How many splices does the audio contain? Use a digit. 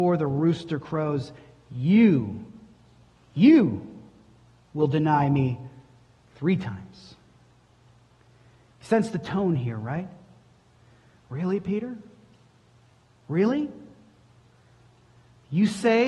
0